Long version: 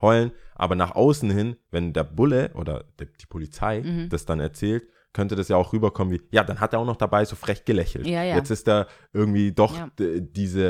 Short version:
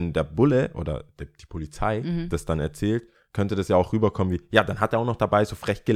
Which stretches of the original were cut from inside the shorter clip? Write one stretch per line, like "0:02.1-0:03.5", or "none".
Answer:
none